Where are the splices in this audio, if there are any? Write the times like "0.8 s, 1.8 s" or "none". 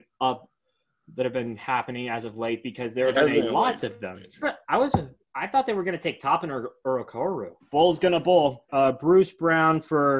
4.4 s, 7.6 s, 8.7 s